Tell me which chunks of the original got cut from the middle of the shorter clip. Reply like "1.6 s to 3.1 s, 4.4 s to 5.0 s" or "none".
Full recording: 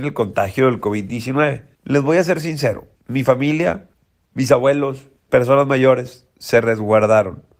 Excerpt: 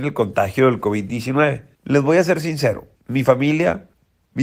none